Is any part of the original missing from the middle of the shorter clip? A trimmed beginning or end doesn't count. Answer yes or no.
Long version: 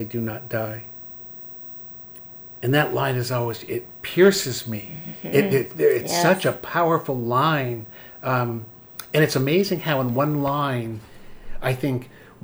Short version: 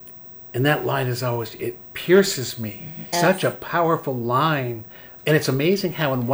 yes